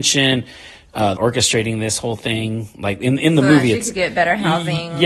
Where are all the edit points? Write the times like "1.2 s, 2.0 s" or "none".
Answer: 1.2 s